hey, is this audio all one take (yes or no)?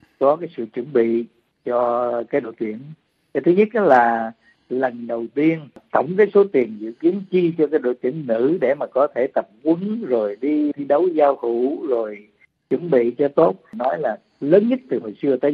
no